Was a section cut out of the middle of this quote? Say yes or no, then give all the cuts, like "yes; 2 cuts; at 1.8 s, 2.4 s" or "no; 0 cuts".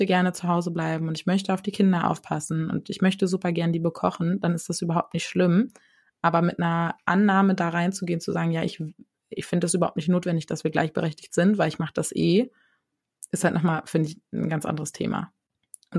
no; 0 cuts